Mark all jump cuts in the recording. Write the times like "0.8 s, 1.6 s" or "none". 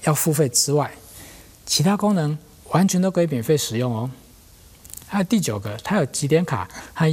none

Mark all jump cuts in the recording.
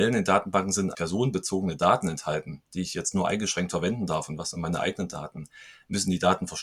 0.9 s

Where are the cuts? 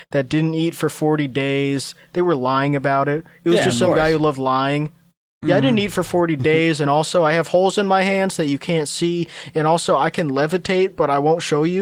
none

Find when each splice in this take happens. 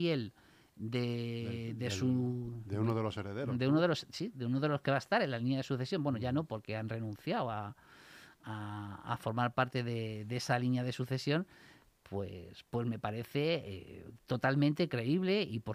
none

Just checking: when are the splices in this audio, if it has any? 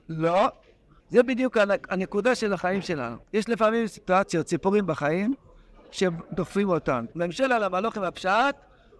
1.0 s, 3.2 s, 7.1 s

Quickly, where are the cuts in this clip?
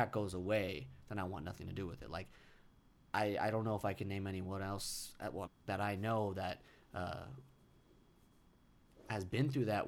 5.5 s

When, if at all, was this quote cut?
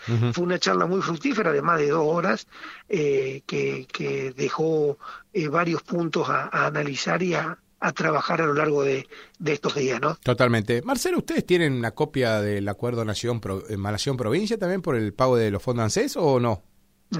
none

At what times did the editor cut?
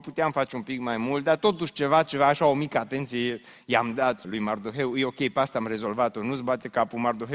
4.2 s

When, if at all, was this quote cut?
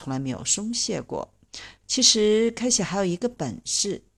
1.8 s

